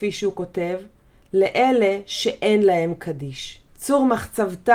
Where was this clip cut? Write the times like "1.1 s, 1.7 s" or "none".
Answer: 3.7 s